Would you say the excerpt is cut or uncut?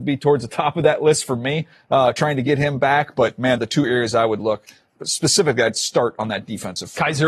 cut